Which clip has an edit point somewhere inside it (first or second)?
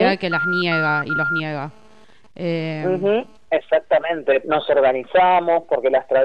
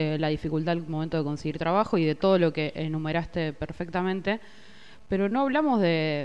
first